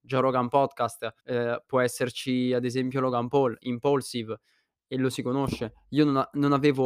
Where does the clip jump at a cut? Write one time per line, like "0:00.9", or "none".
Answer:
0:01.2

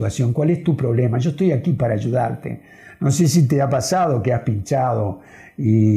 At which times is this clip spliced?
none

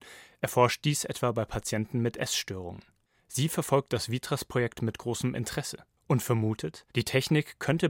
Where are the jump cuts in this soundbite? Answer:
0:06.9

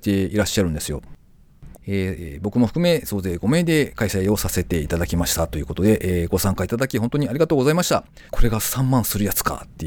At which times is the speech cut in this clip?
0:01.7
0:08.3

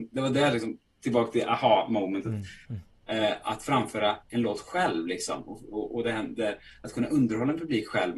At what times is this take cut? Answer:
0:02.7

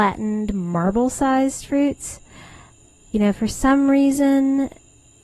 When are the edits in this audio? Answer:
none

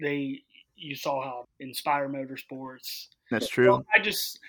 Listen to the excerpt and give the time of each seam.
0:01.4

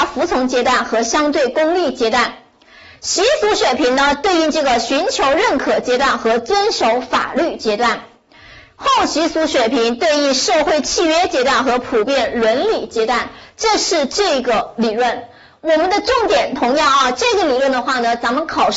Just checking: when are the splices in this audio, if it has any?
none

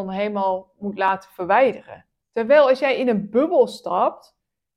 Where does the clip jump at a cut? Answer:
0:02.2

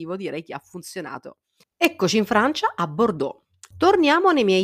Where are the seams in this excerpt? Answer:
0:01.6
0:03.7

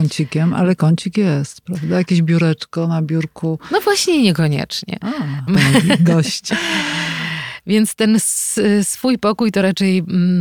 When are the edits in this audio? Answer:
0:05.5
0:06.5

